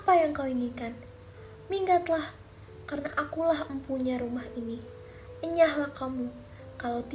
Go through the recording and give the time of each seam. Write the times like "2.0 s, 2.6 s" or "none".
none